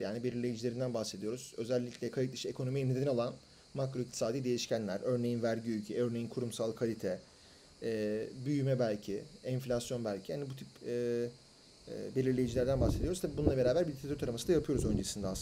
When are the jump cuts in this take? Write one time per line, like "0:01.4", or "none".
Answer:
none